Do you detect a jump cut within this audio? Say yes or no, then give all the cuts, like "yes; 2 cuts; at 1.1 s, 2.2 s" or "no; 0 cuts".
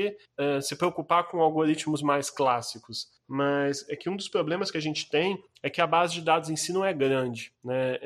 no; 0 cuts